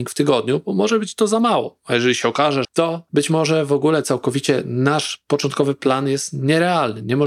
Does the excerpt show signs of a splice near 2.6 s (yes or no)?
yes